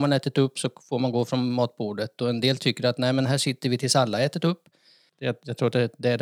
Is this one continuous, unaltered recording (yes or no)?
no